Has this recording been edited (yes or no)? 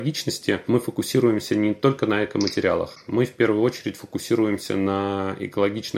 no